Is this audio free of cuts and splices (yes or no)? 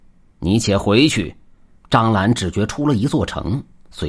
no